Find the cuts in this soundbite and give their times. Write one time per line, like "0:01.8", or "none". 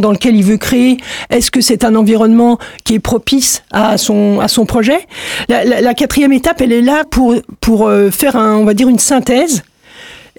0:07.0